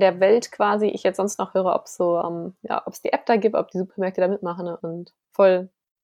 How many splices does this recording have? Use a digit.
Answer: 0